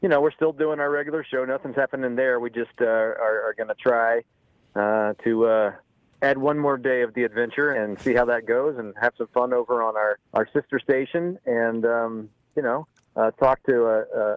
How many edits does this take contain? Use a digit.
2